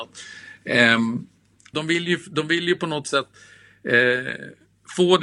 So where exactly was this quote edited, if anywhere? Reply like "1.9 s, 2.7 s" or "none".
1.7 s